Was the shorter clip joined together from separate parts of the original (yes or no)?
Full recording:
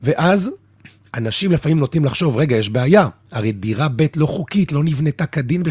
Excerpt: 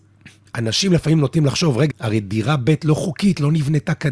yes